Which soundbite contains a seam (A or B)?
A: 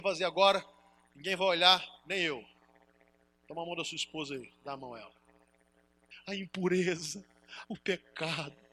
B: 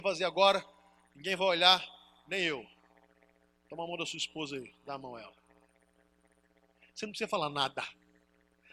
A